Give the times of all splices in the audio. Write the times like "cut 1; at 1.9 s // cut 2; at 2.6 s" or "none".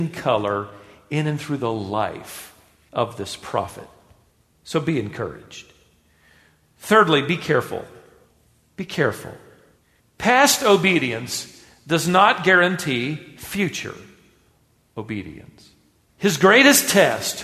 cut 1; at 16.1 s